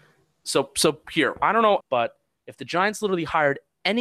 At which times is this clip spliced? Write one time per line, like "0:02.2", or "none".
0:01.8

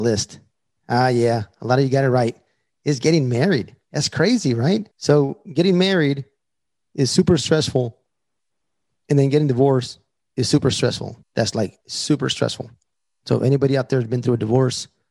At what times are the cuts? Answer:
0:04.9
0:11.2

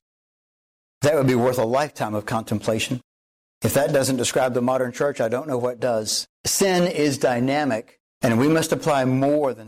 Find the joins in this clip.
0:06.3
0:08.1

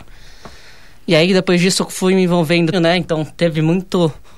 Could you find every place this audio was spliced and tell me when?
0:02.7

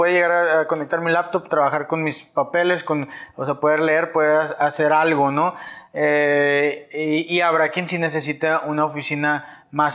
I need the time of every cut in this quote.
none

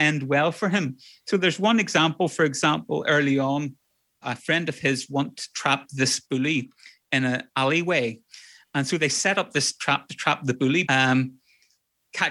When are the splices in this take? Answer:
0:04.2
0:10.9

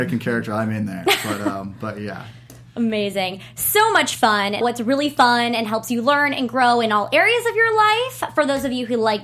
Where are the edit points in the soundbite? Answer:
0:04.6

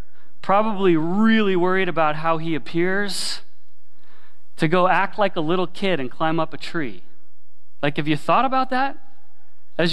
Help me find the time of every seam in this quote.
none

